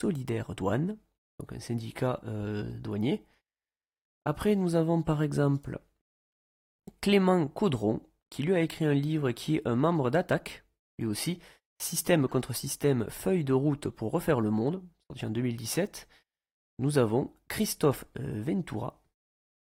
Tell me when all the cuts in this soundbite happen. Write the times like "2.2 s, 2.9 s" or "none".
none